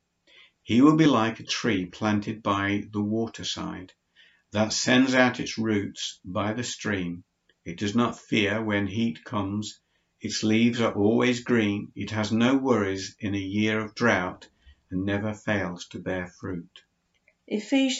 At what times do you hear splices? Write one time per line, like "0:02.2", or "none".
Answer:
none